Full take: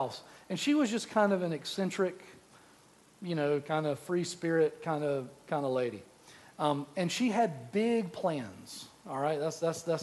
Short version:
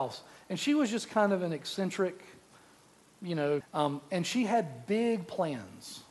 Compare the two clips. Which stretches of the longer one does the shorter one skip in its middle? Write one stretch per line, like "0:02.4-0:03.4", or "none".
0:03.6-0:06.5